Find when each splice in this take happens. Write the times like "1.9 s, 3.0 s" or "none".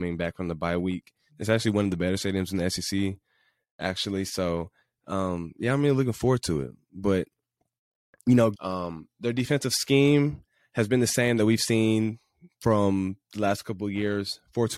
1.3 s, 8.5 s, 13.2 s